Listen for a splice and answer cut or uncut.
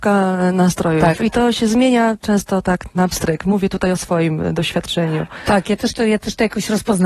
uncut